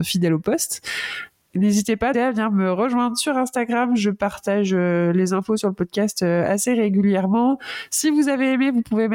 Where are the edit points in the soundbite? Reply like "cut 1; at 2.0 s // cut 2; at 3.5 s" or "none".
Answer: cut 1; at 2.1 s